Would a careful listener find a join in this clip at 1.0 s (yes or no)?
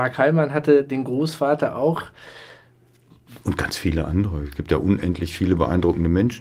no